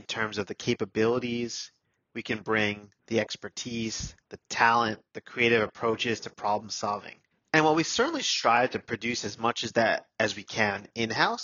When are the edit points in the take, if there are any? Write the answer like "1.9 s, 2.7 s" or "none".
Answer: 3.0 s